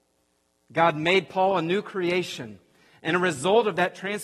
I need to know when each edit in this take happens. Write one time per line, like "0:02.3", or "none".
none